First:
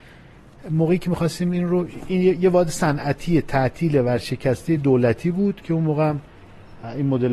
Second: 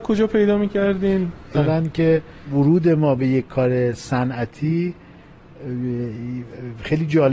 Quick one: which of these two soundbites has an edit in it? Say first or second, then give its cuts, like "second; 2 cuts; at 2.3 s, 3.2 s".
second; 1 cut; at 1.5 s